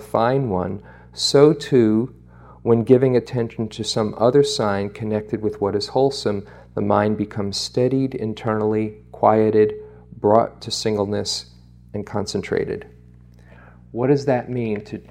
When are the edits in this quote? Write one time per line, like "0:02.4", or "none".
none

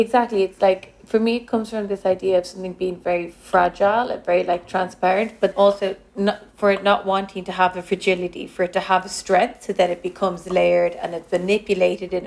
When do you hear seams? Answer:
0:05.5

